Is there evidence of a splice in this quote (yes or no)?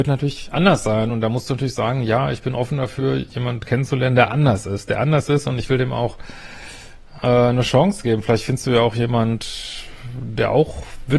no